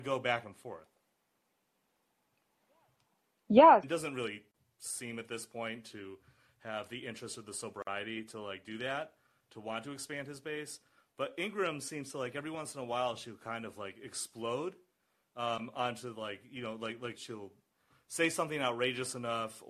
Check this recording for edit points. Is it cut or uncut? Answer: cut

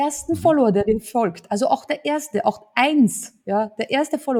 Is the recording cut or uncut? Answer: uncut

